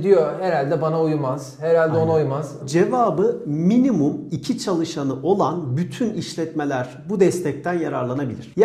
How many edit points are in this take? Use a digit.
1